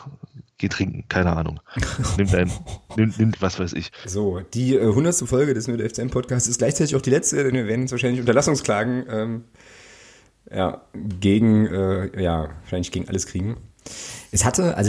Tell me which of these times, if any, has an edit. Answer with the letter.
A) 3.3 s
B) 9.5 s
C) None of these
A